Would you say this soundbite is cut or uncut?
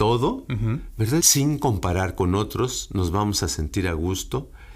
cut